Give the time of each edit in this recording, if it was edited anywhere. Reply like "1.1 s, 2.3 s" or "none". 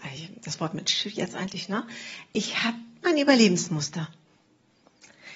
3.0 s